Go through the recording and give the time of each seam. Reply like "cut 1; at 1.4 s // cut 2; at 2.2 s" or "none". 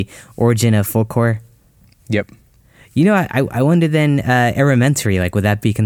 none